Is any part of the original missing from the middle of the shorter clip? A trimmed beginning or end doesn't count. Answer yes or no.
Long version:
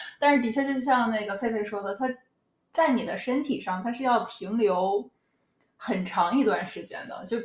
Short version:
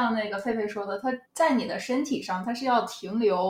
yes